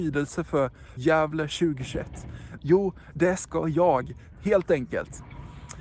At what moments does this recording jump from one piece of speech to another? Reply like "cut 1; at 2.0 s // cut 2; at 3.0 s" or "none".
cut 1; at 1.0 s // cut 2; at 2.6 s // cut 3; at 4.3 s